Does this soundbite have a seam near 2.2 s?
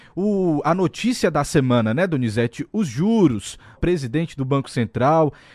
no; 1 cut; at 3.8 s

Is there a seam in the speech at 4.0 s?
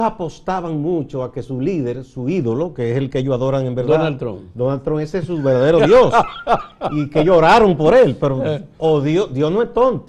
no; 0 cuts

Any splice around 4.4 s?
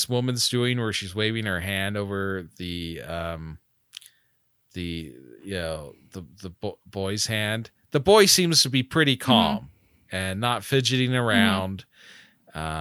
no; 0 cuts

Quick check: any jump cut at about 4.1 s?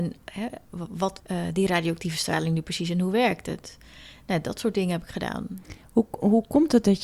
no; 1 cut; at 1.2 s

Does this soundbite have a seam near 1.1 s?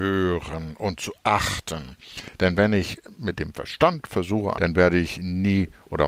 no; 2 cuts; at 2.4 s, 4.5 s

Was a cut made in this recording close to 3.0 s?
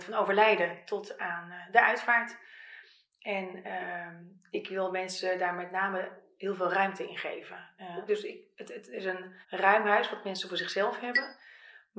no; 2 cuts; at 8.1 s, 9.4 s

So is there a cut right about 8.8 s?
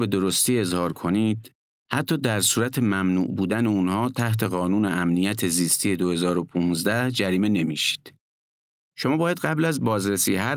yes; 1 cut; at 8.8 s

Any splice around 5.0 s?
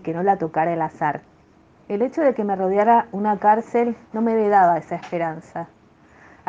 no; 1 cut; at 1.8 s

